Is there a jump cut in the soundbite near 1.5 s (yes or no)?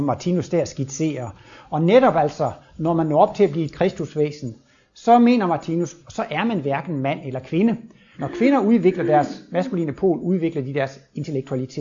no